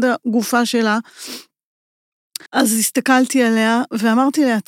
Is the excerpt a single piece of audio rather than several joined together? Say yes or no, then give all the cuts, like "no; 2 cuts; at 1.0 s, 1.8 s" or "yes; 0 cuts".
no; 1 cut; at 2.5 s